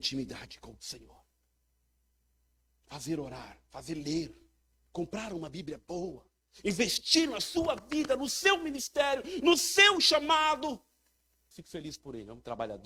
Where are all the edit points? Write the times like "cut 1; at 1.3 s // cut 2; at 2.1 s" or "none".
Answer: cut 1; at 11.5 s

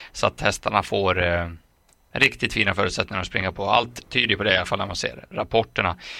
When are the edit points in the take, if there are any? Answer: none

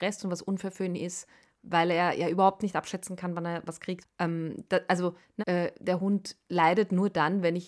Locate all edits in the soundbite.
cut 1; at 4.0 s // cut 2; at 5.4 s

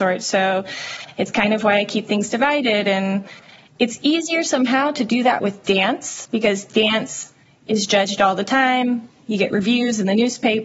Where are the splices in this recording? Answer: none

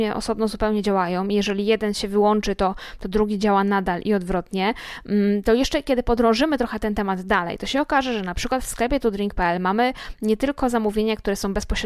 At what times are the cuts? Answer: none

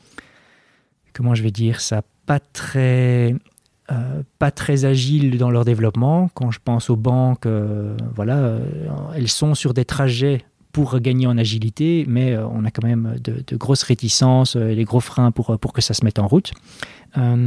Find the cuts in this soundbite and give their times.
none

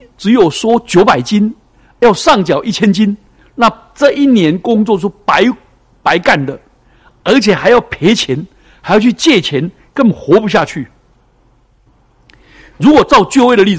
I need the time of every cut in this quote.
none

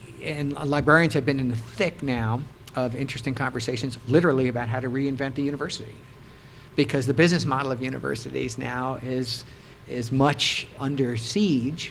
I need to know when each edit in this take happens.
cut 1; at 10.8 s

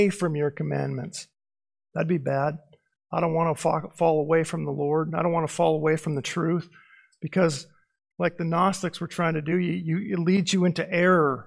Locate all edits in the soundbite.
none

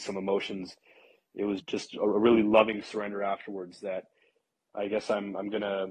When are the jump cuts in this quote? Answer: cut 1; at 1.6 s

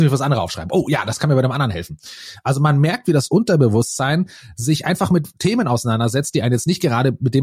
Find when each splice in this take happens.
none

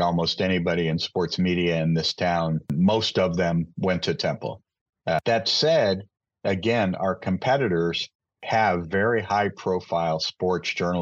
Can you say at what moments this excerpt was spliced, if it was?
none

